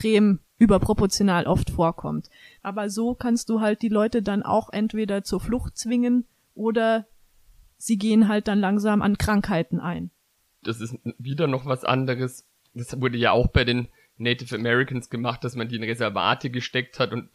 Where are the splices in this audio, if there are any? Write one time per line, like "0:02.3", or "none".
0:02.6